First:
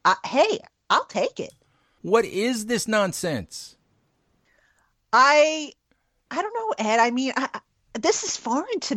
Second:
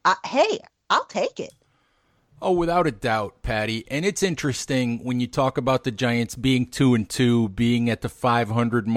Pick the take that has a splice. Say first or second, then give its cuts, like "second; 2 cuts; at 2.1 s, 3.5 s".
first; 1 cut; at 2.0 s